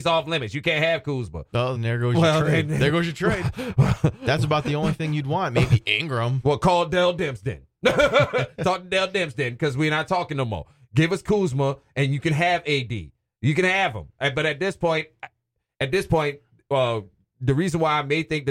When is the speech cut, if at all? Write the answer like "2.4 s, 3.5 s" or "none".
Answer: 1.8 s

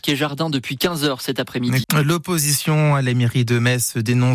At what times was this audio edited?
1.8 s

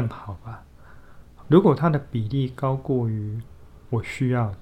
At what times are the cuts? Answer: 1.4 s

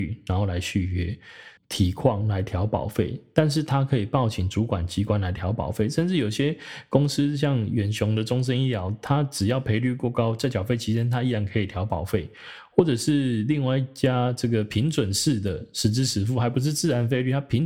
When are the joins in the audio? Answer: 1.6 s

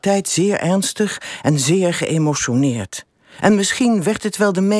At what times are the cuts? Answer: none

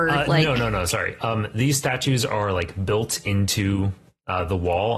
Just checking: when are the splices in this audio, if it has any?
none

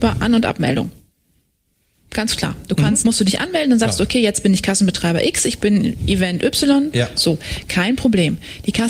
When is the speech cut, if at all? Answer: 3.0 s

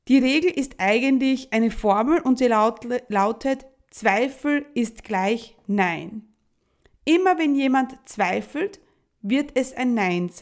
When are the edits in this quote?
none

